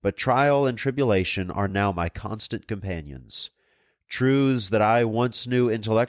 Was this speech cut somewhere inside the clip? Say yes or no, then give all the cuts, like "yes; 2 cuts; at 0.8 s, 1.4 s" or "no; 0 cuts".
no; 0 cuts